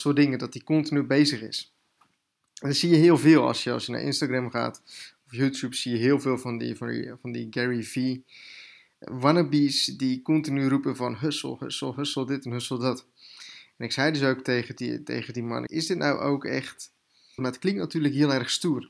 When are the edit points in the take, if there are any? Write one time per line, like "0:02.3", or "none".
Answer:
0:15.7
0:17.4